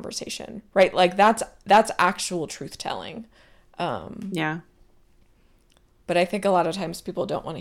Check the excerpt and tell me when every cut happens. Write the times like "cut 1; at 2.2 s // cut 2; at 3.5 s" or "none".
none